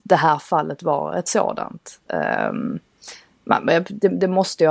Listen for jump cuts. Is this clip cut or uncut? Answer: uncut